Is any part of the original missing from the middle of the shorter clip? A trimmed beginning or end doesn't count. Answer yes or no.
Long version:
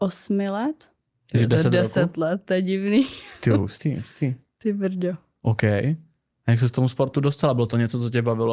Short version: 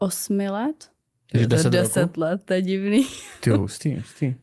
no